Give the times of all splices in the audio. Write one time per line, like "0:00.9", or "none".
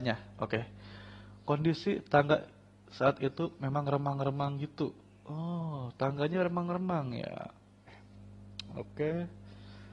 0:07.9